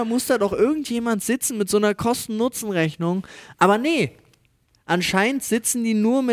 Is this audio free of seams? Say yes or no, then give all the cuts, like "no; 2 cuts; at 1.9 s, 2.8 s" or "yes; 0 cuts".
yes; 0 cuts